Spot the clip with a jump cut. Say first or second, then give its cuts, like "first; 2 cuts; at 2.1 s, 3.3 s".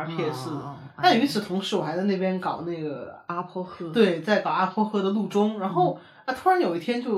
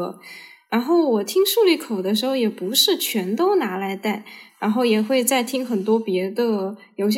second; 1 cut; at 4.5 s